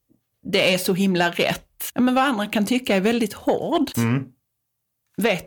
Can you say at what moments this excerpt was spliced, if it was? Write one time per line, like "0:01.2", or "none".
0:01.9
0:03.9